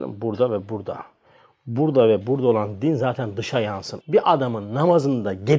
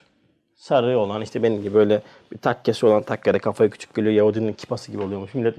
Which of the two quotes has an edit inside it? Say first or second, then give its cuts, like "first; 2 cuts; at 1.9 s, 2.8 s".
first; 1 cut; at 4.0 s